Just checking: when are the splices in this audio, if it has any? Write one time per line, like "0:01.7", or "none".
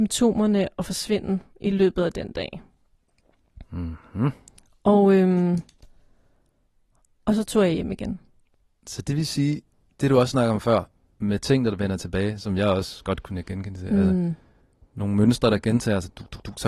none